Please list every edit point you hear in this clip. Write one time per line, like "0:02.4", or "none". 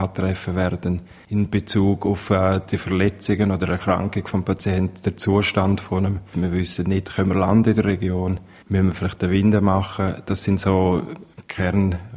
0:06.3